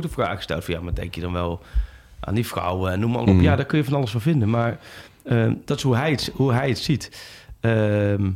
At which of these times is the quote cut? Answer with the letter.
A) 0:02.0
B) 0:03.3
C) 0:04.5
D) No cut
B